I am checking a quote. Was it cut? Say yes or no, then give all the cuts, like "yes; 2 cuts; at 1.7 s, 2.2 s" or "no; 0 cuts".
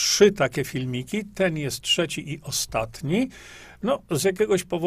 no; 0 cuts